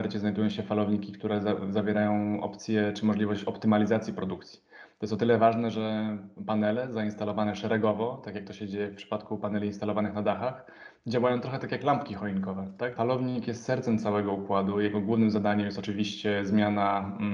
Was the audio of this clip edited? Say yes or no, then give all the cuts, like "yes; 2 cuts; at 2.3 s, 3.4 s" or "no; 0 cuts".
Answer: yes; 1 cut; at 13.0 s